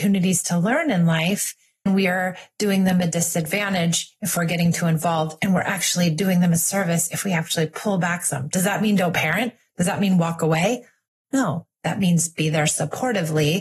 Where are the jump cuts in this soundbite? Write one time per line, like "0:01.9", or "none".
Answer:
0:01.9